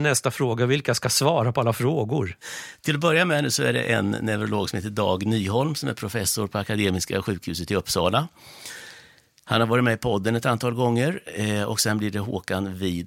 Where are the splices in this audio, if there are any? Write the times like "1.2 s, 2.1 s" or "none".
none